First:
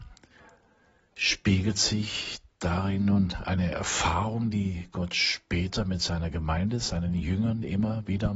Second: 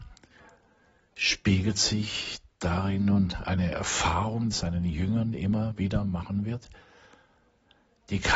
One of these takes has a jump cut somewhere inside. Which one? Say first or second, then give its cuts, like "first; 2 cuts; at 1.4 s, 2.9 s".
second; 1 cut; at 4.5 s